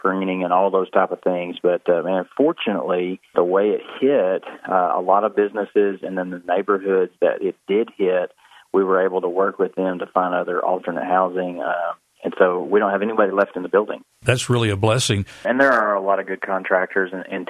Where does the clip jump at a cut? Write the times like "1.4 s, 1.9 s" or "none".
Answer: 15.4 s